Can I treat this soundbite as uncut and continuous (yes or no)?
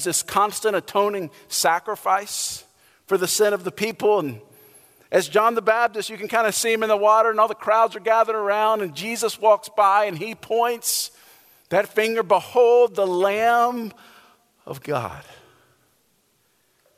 yes